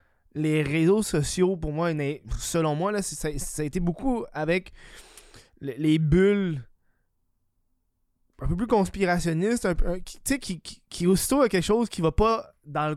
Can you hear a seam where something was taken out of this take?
no; 0 cuts

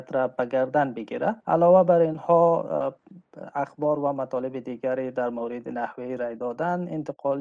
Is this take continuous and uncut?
no; 1 cut; at 1.4 s

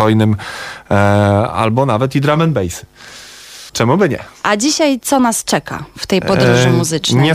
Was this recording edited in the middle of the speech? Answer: yes; 1 cut; at 3.7 s

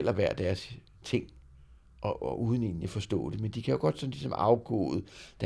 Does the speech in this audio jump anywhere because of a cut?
no; 0 cuts

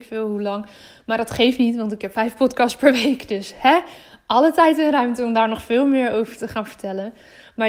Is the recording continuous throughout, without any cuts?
yes; 0 cuts

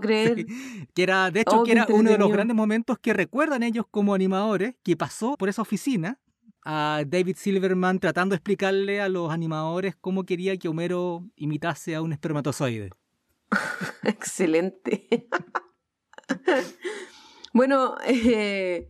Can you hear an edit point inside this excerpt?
no; 0 cuts

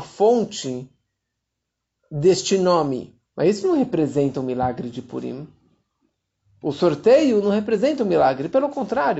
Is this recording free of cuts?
no; 1 cut; at 3.3 s

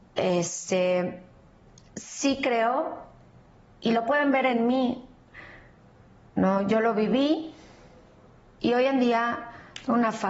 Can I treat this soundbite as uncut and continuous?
yes; 0 cuts

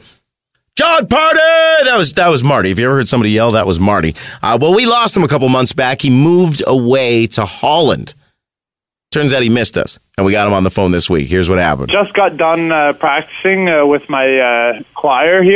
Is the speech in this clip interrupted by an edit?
no; 0 cuts

